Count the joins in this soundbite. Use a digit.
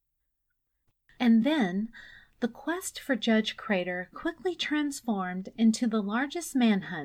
0